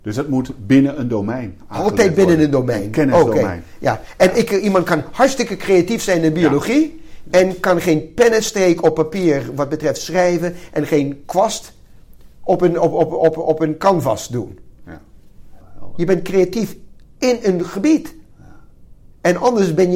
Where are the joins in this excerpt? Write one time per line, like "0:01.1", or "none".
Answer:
0:15.6